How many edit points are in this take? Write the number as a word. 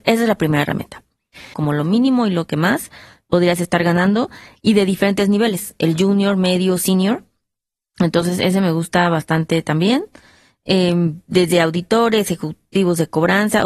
one